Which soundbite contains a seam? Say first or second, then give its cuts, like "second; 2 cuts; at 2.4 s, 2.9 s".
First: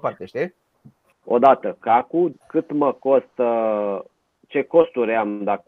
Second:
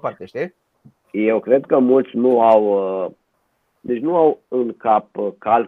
first; 2 cuts; at 1.1 s, 2.3 s